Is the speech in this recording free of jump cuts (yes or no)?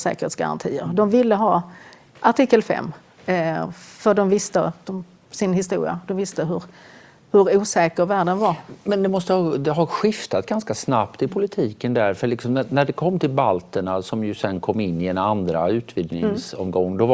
yes